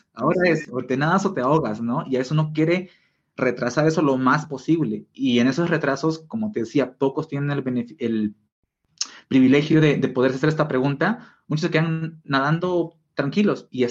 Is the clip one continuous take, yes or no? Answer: yes